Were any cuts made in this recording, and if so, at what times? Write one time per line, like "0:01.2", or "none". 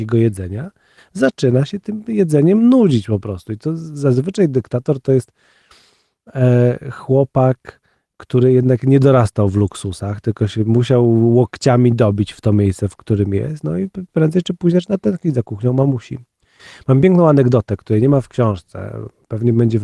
none